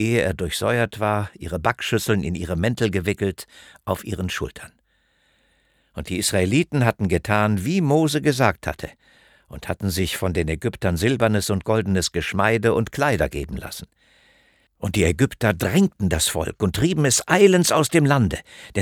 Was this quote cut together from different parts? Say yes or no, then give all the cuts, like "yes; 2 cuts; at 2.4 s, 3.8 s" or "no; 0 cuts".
yes; 1 cut; at 14.7 s